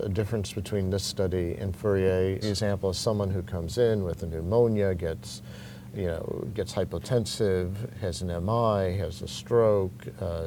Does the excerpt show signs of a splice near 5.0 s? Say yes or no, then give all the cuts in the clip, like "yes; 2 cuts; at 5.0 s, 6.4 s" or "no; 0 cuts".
no; 1 cut; at 2.4 s